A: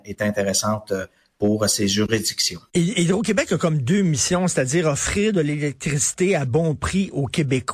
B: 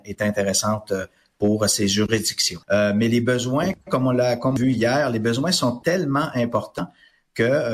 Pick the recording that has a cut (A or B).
B